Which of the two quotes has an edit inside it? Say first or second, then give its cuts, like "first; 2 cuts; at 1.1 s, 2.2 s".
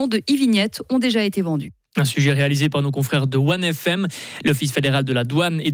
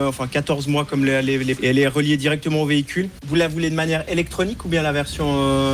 second; 2 cuts; at 1.6 s, 3.2 s